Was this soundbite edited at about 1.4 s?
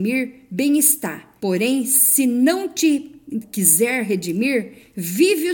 yes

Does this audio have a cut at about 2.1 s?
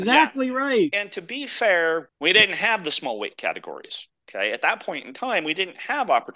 yes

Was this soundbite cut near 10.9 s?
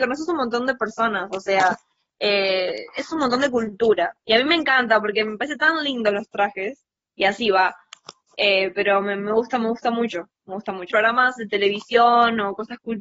yes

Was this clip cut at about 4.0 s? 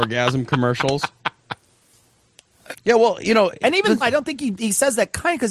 yes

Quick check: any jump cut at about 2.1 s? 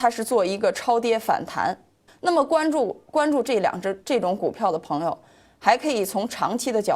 yes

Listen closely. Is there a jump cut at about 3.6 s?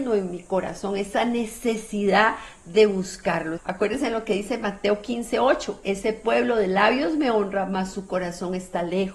yes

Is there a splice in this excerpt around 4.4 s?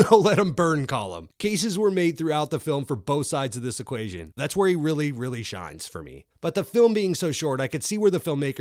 yes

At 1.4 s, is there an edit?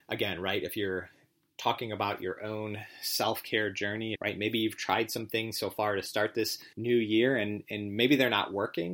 no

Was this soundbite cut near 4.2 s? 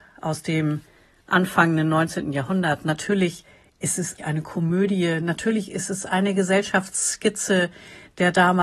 yes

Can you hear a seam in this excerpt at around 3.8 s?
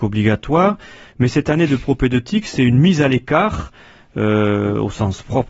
no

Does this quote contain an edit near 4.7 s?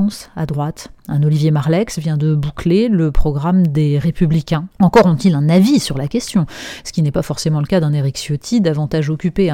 yes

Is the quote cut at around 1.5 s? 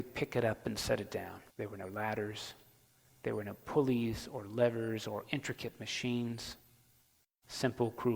yes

